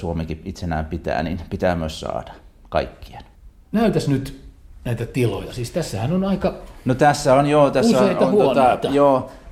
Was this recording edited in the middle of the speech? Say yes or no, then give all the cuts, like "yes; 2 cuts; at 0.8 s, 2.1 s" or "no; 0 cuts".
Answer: no; 0 cuts